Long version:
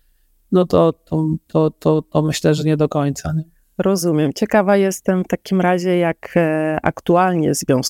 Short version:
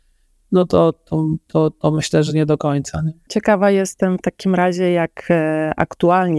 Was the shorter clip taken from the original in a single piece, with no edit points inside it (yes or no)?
no